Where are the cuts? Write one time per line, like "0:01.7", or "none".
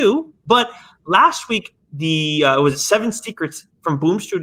0:01.8